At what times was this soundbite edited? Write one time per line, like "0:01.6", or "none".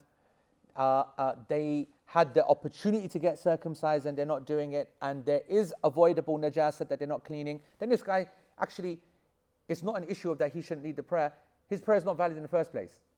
none